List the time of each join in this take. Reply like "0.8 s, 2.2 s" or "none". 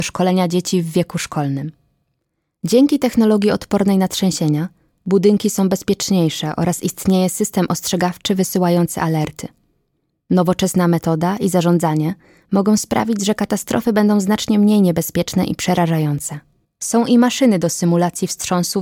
16.6 s